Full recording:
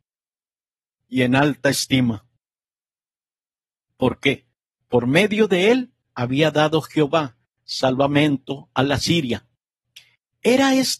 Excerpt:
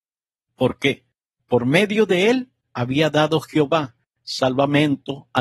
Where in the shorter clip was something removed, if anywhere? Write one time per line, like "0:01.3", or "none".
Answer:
none